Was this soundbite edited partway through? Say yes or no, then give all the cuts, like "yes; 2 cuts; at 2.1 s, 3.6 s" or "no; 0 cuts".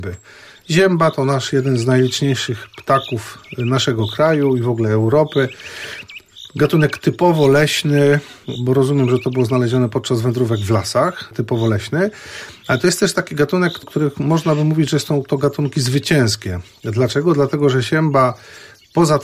no; 0 cuts